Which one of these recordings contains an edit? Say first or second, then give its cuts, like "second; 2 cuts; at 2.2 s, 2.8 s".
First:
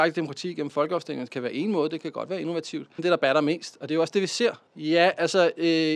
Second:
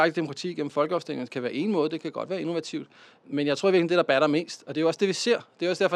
first; 2 cuts; at 3.0 s, 4.7 s